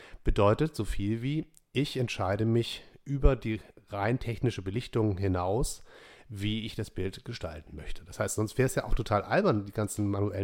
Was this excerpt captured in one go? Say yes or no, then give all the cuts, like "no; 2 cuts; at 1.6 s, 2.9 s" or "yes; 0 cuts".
yes; 0 cuts